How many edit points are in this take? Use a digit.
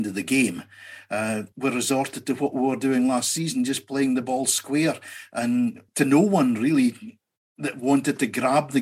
2